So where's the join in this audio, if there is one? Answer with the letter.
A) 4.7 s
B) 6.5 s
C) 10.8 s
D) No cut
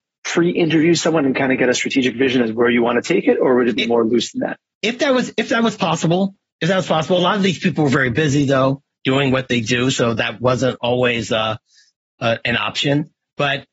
D